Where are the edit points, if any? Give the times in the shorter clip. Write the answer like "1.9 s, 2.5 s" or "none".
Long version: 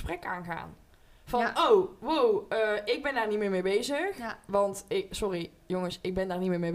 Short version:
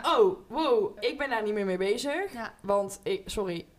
1.0 s